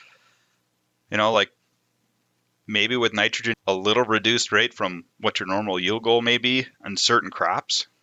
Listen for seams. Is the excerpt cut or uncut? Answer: cut